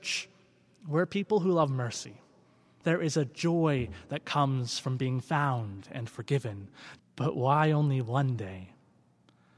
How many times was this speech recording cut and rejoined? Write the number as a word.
two